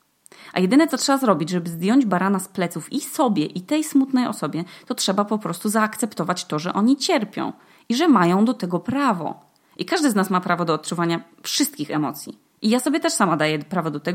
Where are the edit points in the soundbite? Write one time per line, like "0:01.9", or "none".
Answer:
none